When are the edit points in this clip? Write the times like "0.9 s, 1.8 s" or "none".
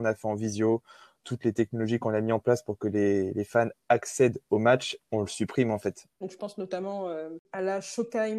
6.2 s